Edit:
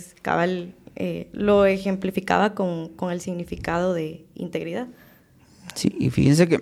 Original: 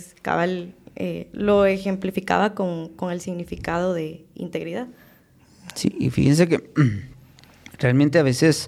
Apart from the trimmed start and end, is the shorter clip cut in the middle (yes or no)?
no